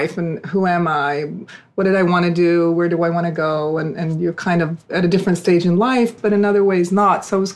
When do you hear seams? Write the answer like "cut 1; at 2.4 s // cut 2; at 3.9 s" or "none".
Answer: cut 1; at 6.2 s